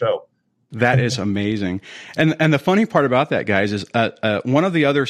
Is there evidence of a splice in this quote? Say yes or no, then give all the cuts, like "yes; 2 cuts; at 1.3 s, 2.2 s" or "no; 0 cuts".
no; 0 cuts